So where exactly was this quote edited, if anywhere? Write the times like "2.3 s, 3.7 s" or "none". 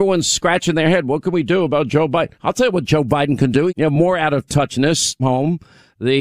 3.7 s, 5.2 s